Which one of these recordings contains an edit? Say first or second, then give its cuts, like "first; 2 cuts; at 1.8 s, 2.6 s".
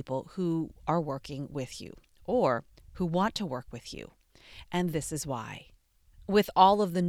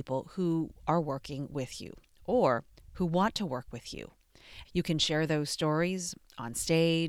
second; 1 cut; at 4.6 s